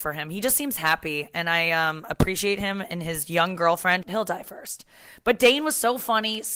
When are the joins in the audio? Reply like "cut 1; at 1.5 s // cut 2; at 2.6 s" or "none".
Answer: cut 1; at 4.0 s